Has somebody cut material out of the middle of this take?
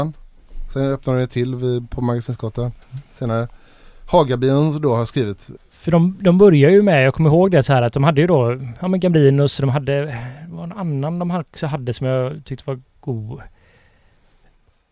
yes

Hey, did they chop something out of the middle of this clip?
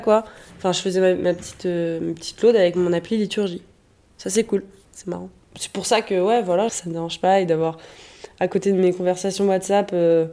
yes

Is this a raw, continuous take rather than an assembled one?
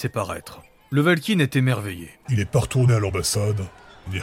no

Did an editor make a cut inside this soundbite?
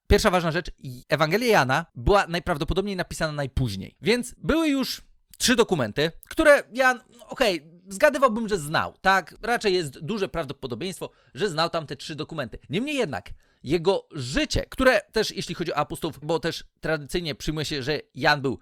yes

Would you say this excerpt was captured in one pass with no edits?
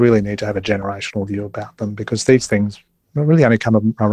no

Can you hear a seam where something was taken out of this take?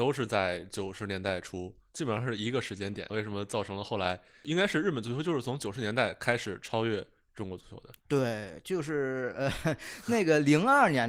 yes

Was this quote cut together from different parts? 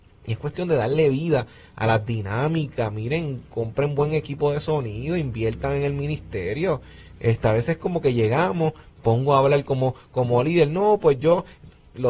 no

